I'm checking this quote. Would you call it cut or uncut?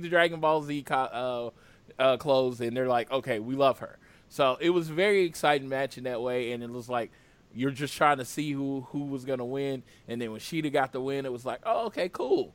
uncut